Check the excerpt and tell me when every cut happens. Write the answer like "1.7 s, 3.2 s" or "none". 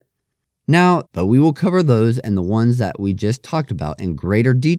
1.0 s